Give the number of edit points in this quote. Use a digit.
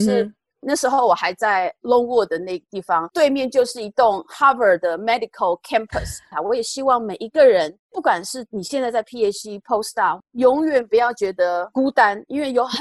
1